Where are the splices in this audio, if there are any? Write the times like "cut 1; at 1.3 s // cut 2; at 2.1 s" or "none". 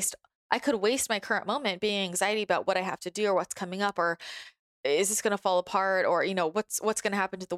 none